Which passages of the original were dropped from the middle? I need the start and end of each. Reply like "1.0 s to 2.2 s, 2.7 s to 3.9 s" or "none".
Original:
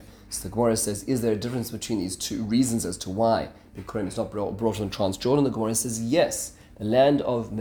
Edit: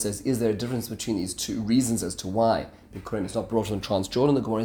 4.3 s to 4.6 s